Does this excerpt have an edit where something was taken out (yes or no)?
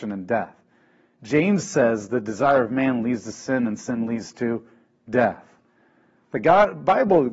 no